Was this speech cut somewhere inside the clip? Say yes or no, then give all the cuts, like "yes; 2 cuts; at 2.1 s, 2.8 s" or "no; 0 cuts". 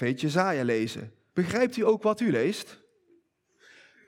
yes; 1 cut; at 1.3 s